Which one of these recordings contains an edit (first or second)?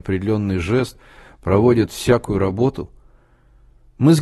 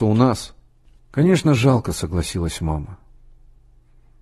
second